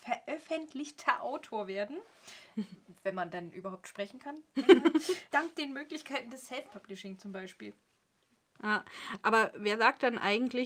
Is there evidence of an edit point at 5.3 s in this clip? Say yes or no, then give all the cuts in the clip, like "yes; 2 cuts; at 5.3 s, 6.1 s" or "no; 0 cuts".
yes; 1 cut; at 5.3 s